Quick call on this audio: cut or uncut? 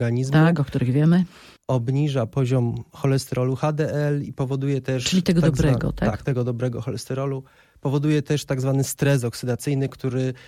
uncut